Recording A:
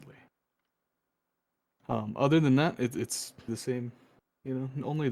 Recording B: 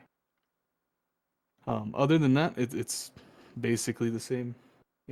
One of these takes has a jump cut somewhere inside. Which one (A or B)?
A